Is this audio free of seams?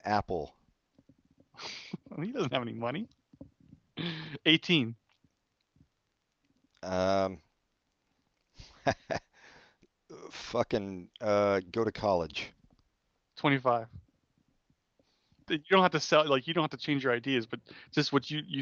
no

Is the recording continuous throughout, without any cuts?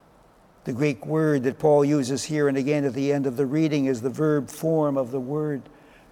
yes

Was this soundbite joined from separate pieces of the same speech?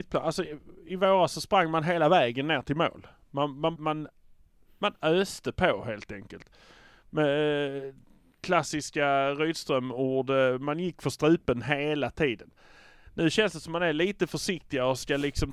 yes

